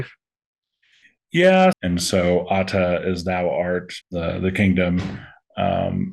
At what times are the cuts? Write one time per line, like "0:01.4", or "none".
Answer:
0:01.7
0:04.0